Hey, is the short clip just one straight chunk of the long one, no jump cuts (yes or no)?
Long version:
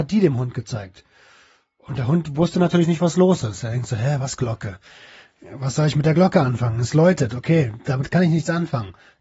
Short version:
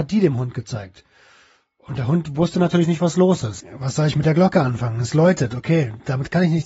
no